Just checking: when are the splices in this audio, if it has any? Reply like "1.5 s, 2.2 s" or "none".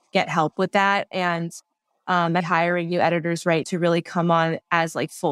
2.4 s, 3.6 s

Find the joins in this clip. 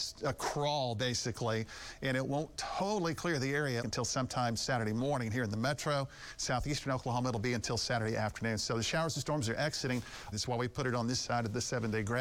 3.8 s, 10.3 s

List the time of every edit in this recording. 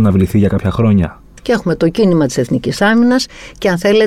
1.4 s

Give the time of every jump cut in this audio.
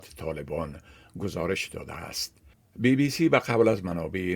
2.5 s

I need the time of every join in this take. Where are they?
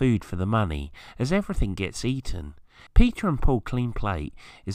2.9 s

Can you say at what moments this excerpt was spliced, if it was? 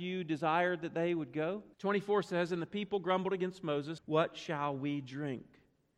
1.7 s, 4.0 s

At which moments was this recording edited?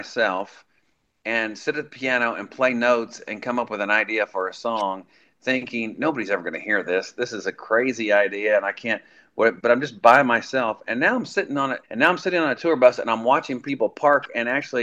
11.8 s

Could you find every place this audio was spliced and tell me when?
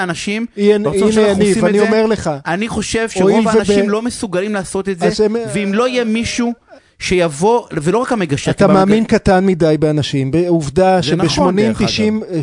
none

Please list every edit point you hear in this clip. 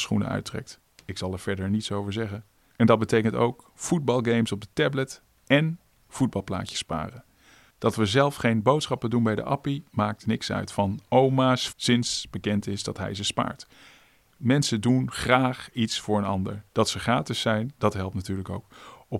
11.7 s, 16.7 s

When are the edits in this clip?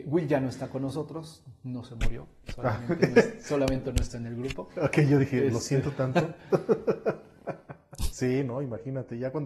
8.1 s

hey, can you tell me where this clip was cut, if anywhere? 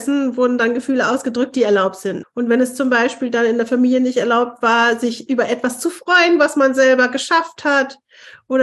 2.2 s

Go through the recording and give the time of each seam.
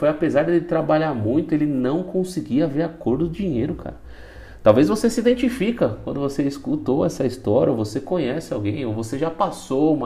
none

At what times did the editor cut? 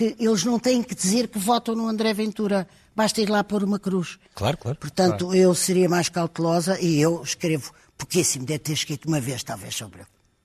none

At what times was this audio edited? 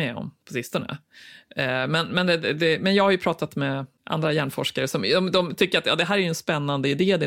none

